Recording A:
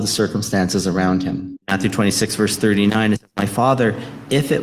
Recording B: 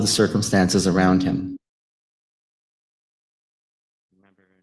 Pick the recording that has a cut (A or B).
A